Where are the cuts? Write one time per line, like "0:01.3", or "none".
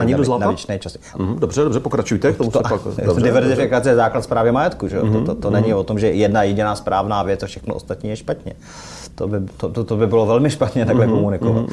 0:01.1